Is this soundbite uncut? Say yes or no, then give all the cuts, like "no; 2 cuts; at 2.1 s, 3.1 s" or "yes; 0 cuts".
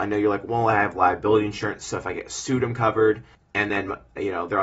yes; 0 cuts